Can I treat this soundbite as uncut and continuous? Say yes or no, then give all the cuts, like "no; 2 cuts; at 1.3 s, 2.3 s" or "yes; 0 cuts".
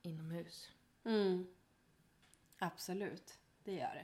yes; 0 cuts